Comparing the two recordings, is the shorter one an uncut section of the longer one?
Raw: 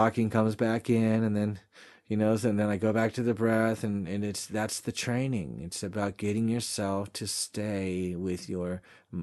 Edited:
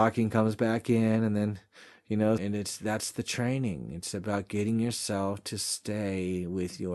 no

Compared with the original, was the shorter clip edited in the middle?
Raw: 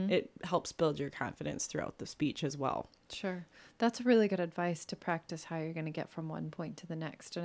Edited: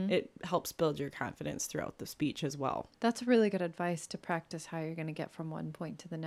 yes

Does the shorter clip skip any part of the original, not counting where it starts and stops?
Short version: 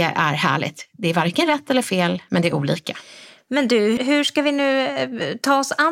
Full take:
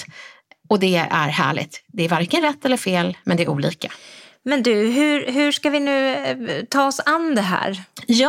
yes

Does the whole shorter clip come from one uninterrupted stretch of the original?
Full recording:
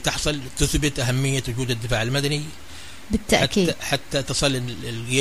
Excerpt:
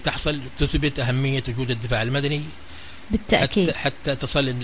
no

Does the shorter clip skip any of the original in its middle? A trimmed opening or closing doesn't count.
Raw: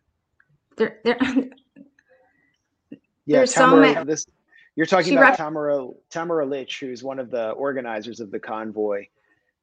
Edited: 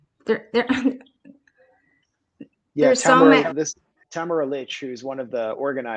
yes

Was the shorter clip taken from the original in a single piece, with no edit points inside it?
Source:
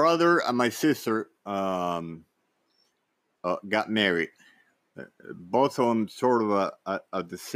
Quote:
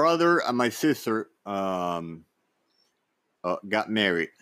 yes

